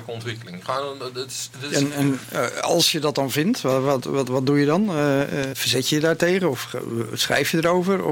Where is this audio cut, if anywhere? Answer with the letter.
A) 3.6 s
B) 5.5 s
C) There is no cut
B